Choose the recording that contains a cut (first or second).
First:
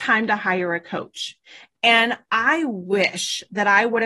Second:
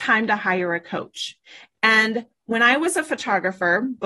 first